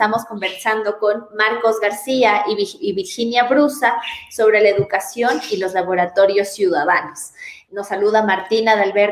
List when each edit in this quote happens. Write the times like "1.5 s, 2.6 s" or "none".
7.7 s